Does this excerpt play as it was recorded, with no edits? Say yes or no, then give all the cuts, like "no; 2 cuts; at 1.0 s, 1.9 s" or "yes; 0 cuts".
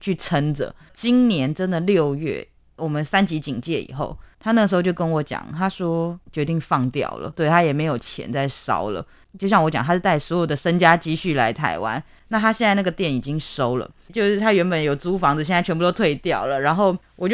yes; 0 cuts